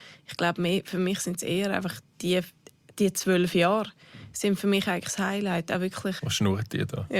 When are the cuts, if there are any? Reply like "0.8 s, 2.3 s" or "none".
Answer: 2.1 s, 6.2 s

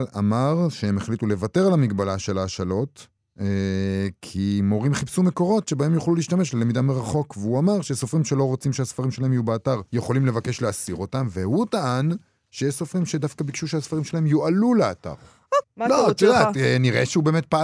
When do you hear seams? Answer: 9.9 s, 15.6 s

